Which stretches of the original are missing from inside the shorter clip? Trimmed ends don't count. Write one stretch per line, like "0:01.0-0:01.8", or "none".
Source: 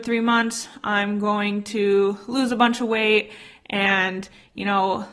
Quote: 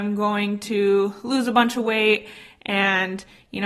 none